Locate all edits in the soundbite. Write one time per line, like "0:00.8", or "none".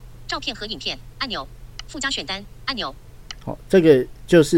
0:01.9
0:03.4